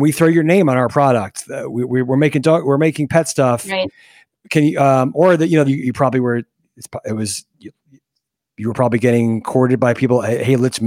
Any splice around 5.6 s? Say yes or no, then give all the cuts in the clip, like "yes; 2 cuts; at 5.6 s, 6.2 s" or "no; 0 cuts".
yes; 1 cut; at 5.6 s